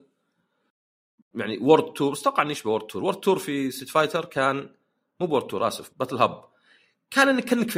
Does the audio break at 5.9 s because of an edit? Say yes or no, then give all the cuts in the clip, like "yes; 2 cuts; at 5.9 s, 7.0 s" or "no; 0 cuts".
yes; 1 cut; at 5.9 s